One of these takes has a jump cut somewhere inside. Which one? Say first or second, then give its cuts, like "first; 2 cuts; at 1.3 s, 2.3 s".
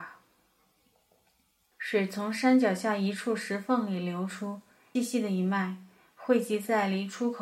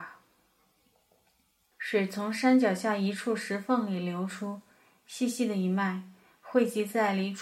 first; 1 cut; at 5.0 s